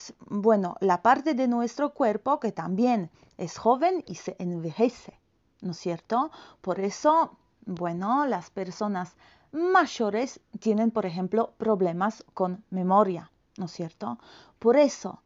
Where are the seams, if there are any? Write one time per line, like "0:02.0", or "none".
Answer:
none